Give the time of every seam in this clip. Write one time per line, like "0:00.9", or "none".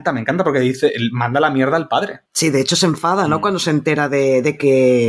none